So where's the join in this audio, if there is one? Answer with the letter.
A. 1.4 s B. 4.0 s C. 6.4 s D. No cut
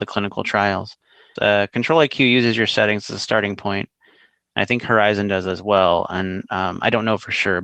A